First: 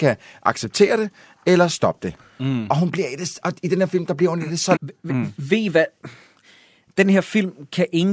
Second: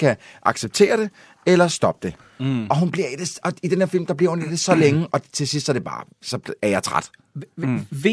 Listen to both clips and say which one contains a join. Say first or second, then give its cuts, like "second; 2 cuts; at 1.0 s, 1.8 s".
first; 1 cut; at 4.8 s